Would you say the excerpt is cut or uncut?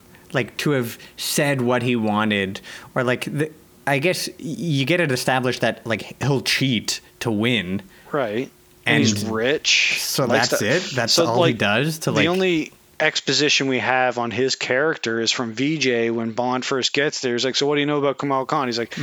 uncut